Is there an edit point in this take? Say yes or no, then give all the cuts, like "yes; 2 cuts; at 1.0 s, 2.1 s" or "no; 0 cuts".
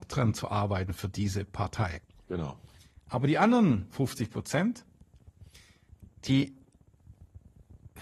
no; 0 cuts